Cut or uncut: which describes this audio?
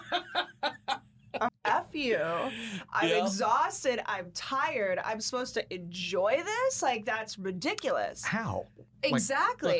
cut